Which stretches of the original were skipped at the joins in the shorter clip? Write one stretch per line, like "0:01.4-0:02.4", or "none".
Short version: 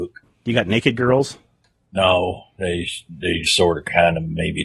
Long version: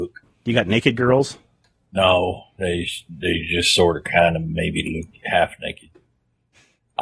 0:03.5-0:03.7